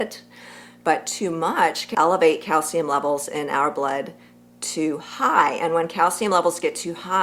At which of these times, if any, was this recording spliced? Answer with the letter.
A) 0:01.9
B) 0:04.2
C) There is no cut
A